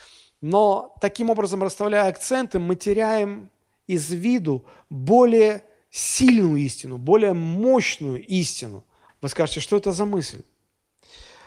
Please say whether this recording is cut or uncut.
cut